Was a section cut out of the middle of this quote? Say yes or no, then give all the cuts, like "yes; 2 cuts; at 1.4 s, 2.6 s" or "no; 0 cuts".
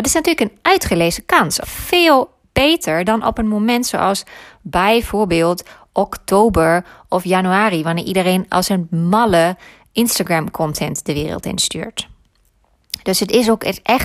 yes; 1 cut; at 1.6 s